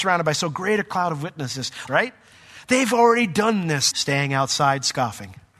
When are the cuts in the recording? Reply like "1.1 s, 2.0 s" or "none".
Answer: 1.9 s, 3.9 s